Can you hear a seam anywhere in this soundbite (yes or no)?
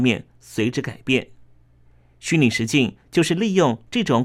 no